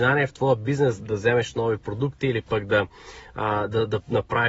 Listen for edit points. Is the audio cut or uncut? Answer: cut